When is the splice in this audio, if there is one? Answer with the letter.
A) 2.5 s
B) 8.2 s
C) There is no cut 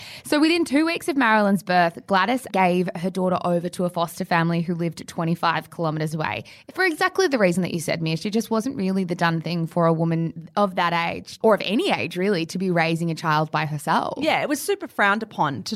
A